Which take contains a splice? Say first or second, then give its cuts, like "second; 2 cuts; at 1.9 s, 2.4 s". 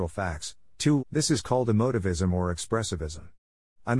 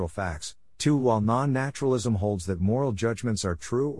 first; 1 cut; at 1.0 s